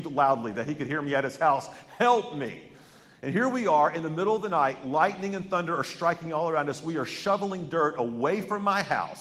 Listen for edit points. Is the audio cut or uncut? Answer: uncut